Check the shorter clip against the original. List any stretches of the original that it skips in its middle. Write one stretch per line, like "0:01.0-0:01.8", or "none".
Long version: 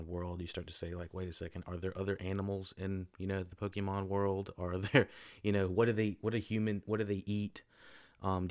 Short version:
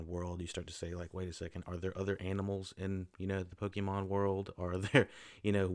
none